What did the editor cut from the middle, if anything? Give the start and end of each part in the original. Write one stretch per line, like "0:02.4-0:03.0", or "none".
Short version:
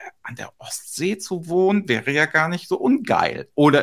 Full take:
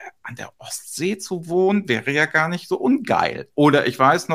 none